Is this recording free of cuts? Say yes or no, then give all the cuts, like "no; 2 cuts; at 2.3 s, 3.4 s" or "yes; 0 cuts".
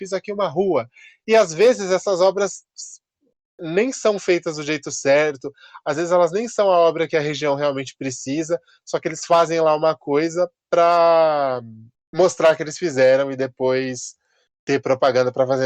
yes; 0 cuts